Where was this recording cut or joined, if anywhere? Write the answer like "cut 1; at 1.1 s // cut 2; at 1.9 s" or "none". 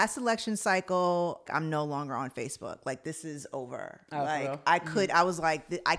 cut 1; at 1.5 s